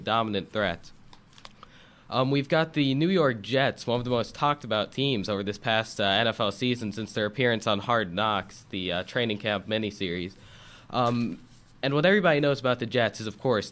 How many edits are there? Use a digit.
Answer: 0